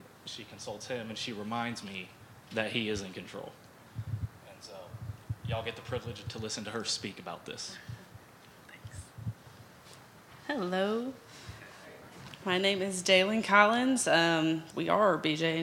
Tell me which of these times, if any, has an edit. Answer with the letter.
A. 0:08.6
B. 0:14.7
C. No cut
B